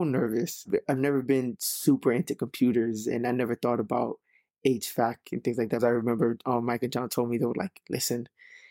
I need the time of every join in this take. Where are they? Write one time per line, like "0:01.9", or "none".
none